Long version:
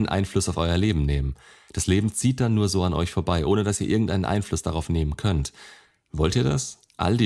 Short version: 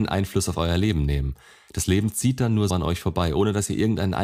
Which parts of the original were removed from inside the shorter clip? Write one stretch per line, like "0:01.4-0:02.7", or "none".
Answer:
0:02.7-0:02.8